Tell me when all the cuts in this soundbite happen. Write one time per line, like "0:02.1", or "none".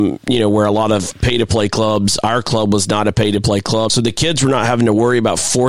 0:03.9